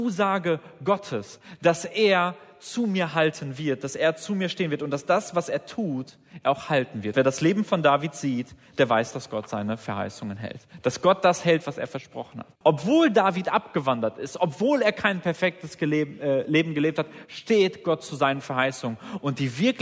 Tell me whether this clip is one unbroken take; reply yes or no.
no